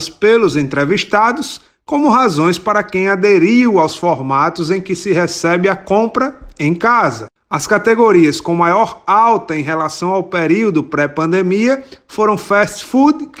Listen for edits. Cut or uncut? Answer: uncut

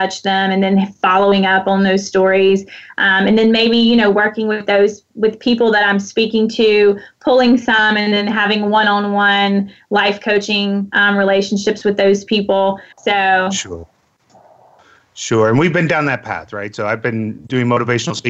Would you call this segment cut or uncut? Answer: cut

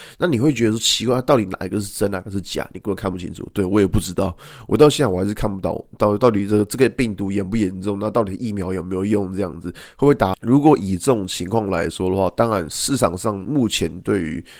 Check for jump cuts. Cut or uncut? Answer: cut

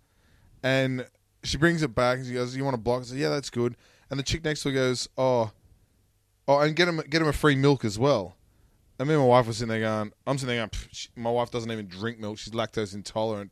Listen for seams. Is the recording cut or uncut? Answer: uncut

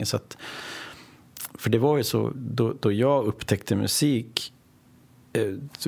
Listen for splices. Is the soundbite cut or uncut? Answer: uncut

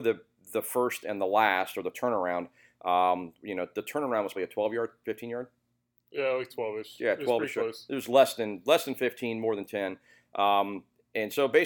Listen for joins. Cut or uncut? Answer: cut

